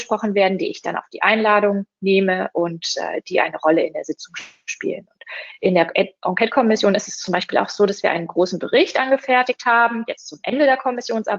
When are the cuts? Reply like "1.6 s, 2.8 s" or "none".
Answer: none